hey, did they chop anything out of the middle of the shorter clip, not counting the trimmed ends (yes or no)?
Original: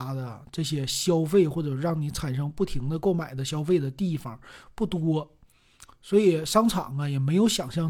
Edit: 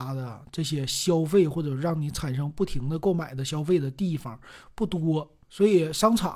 yes